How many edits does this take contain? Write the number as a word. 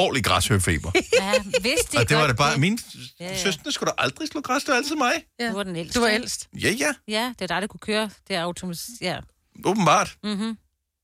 zero